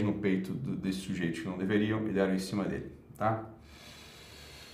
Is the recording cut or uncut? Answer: uncut